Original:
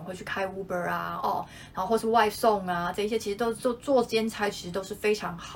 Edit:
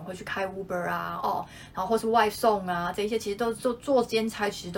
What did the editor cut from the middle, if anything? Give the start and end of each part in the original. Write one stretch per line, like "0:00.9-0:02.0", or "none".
none